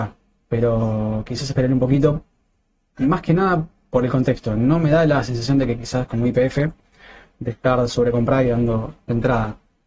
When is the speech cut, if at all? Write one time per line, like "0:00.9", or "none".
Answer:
none